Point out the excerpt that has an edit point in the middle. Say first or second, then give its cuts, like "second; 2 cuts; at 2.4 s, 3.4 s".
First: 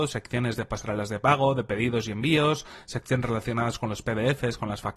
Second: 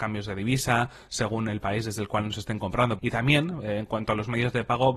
second; 1 cut; at 3.0 s